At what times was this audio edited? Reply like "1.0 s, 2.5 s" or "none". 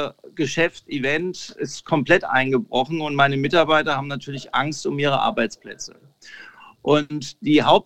none